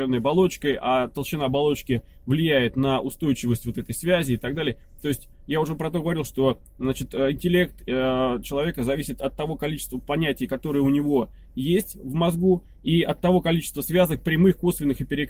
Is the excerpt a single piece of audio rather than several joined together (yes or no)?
yes